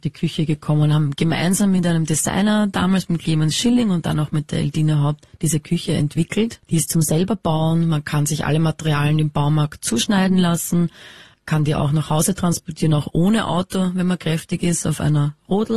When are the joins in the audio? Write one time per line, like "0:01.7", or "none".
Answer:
none